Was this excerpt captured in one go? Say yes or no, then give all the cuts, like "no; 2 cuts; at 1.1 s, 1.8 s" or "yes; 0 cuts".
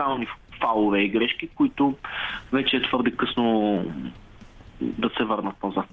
yes; 0 cuts